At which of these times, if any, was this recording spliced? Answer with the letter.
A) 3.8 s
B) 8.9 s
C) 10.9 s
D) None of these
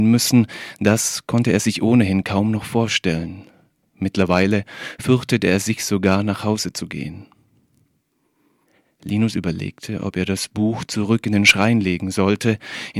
D